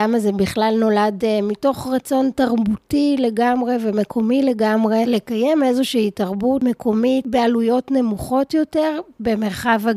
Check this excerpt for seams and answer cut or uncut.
uncut